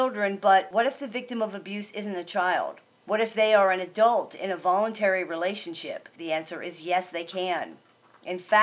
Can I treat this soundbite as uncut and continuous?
no; 1 cut; at 6.2 s

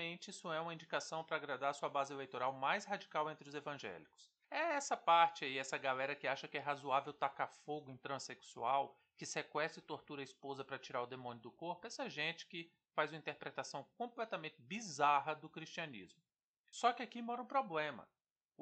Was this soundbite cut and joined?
no; 0 cuts

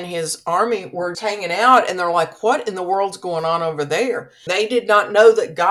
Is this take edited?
yes; 2 cuts; at 1.1 s, 4.5 s

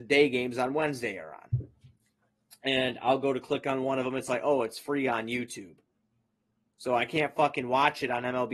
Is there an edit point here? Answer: no; 0 cuts

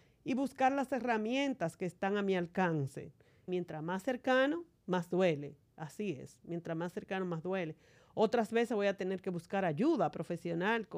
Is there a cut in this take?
yes; 1 cut; at 3.5 s

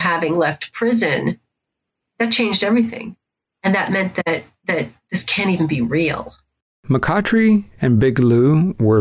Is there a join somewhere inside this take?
no; 0 cuts

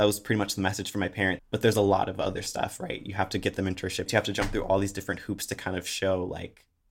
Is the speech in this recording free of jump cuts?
no; 2 cuts; at 1.4 s, 4.1 s

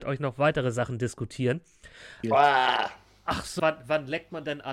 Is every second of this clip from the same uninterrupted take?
no; 2 cuts; at 2.2 s, 3.6 s

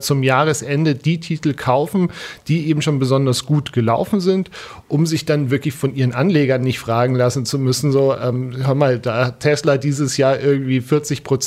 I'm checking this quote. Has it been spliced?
no; 0 cuts

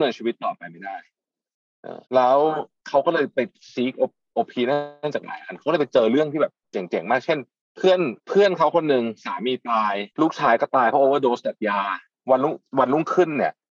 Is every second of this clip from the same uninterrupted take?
no; 3 cuts; at 2.1 s, 8.2 s, 10.1 s

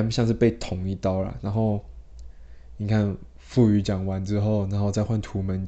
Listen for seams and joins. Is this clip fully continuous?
yes; 0 cuts

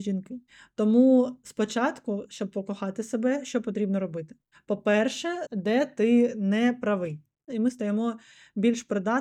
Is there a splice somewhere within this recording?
yes; 2 cuts; at 5.5 s, 7.5 s

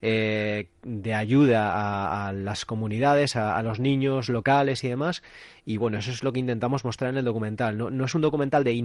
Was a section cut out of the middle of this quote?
no; 0 cuts

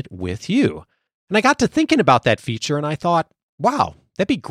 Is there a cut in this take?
no; 0 cuts

